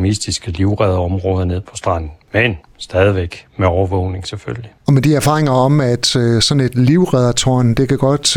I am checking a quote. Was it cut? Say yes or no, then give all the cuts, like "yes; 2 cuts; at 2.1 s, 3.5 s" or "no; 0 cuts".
no; 0 cuts